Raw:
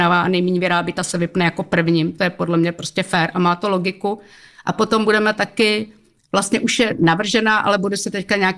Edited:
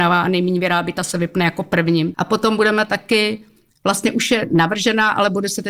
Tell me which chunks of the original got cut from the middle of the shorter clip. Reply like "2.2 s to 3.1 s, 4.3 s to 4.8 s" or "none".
2.1 s to 4.6 s